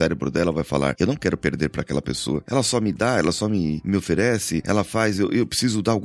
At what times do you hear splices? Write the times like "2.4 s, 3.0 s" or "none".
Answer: none

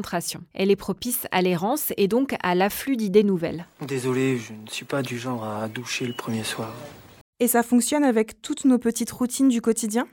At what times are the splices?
7.2 s

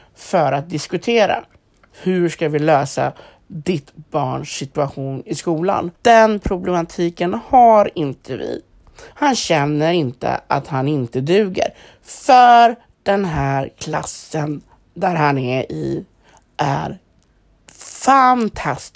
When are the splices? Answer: 6.0 s, 9.1 s

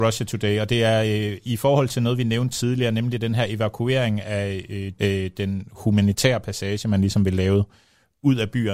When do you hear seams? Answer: 5.0 s

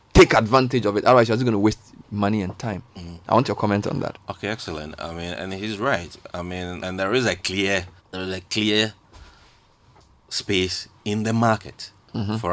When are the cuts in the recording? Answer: 6.8 s, 8.0 s

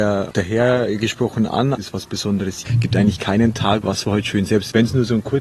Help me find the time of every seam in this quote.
1.8 s, 3.8 s

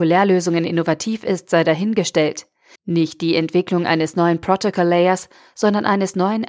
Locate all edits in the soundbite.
2.7 s

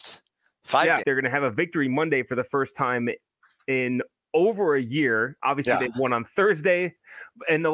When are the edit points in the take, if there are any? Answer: 1.0 s

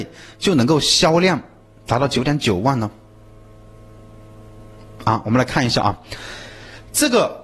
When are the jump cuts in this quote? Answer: none

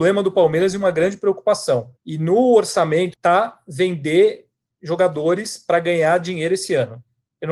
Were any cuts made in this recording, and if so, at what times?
2.0 s, 3.1 s

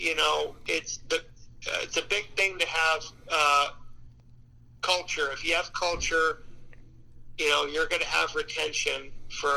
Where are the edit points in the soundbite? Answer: none

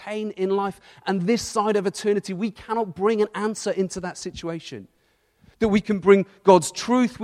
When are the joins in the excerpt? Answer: none

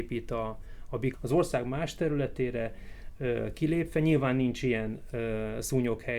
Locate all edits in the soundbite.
1.1 s

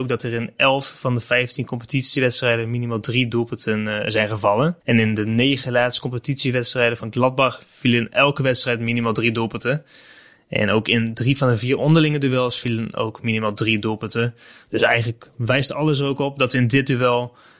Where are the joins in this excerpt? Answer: 4.8 s

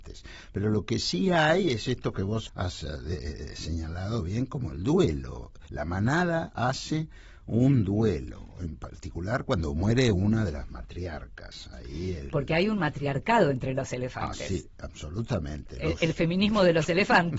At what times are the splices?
2.5 s

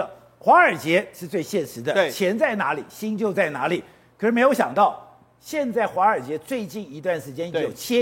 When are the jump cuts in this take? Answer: none

